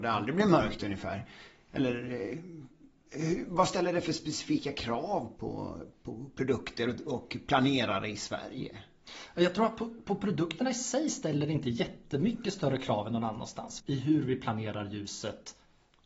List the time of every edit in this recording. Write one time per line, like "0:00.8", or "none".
0:05.4
0:13.8